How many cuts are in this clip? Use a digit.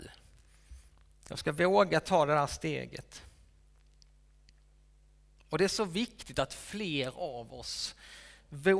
0